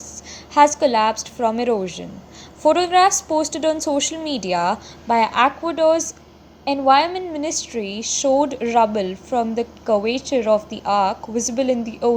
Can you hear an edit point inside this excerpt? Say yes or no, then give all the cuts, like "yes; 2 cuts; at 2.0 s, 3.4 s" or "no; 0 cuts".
no; 0 cuts